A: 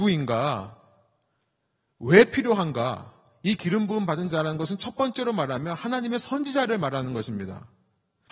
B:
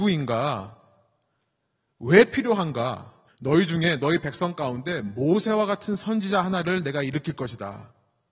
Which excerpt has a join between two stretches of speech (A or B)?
B